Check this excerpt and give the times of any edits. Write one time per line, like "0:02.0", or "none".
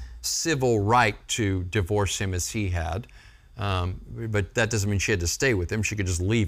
none